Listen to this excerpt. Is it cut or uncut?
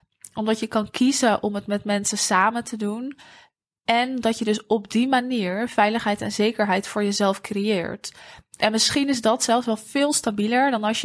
uncut